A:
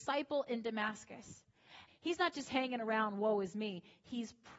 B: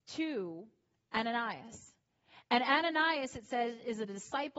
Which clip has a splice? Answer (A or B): A